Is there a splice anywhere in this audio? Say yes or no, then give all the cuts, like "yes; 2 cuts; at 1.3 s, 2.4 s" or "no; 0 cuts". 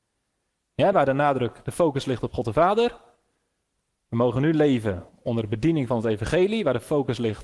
yes; 1 cut; at 0.9 s